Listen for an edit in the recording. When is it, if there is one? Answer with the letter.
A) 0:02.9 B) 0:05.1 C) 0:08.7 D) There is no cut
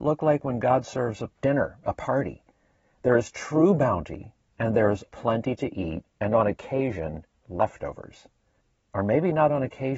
B